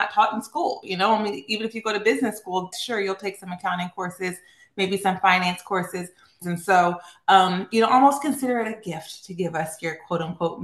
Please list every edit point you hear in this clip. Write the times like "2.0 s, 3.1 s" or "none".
2.7 s, 6.4 s